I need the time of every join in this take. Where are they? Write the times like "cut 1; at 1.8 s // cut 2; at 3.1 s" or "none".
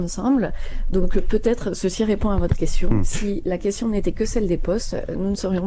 none